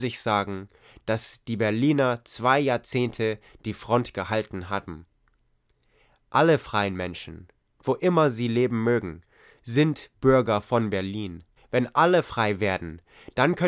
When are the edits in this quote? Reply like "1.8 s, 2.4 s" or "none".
11.6 s